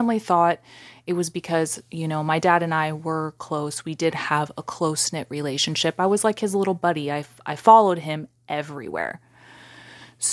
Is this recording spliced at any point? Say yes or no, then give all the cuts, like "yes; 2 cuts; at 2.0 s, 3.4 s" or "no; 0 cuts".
no; 0 cuts